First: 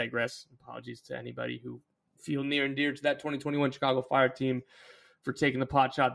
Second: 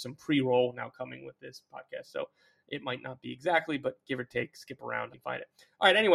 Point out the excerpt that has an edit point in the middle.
second; 1 cut; at 5.1 s

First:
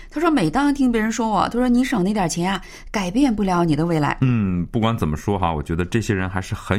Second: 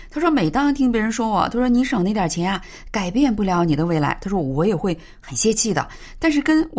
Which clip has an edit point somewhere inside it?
first; 1 cut; at 4.2 s

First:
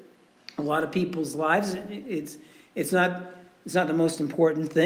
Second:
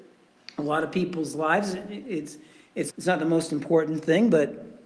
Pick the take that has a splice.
second; 1 cut; at 2.9 s

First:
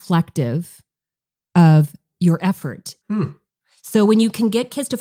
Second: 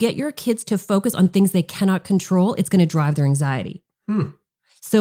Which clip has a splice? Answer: first; 1 cut; at 3.0 s

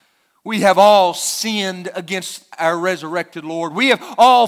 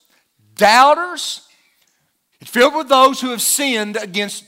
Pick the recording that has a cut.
second; 1 cut; at 2.3 s

